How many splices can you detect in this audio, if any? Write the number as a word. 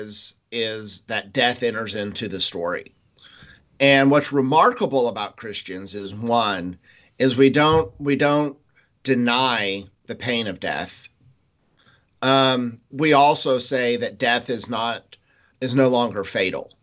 two